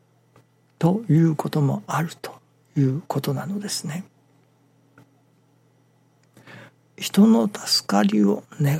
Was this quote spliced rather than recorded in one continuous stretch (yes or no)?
yes